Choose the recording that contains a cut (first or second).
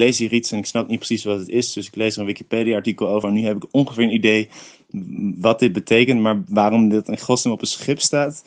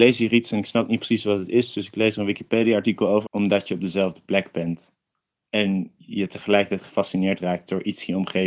second